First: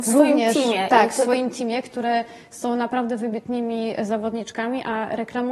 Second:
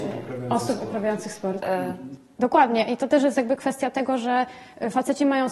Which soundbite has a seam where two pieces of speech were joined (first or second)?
second